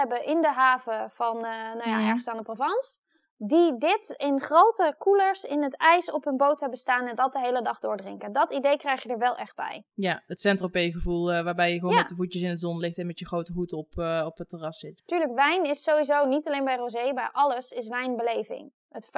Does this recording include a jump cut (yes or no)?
yes